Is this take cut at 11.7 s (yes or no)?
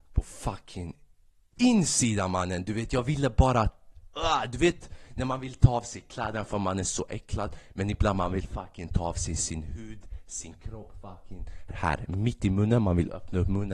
yes